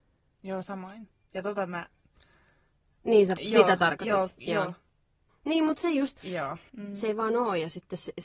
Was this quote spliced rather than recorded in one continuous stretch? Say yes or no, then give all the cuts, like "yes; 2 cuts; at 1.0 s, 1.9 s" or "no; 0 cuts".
yes; 3 cuts; at 3.4 s, 5.3 s, 6.7 s